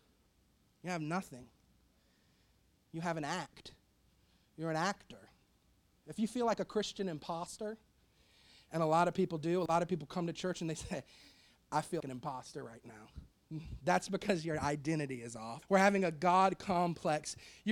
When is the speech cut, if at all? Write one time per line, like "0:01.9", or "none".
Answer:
0:12.0
0:15.6